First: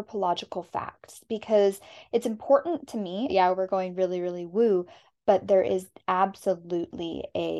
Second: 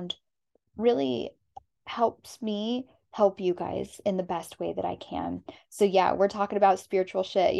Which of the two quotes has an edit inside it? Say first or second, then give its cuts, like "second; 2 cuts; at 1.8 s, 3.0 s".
first; 1 cut; at 3.3 s